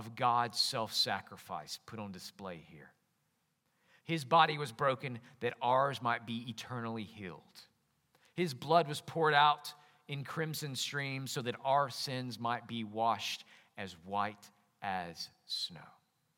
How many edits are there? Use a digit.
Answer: 1